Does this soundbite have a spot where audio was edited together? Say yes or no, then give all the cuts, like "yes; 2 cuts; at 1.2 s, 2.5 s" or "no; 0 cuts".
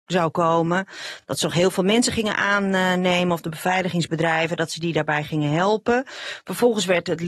no; 0 cuts